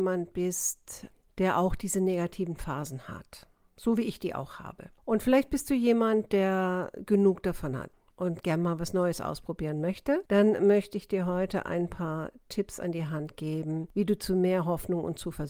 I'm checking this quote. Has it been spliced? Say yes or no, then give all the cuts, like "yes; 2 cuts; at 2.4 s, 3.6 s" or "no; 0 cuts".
yes; 1 cut; at 5.0 s